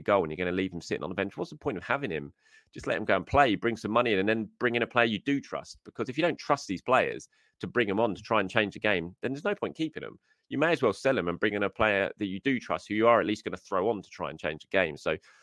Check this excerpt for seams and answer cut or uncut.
uncut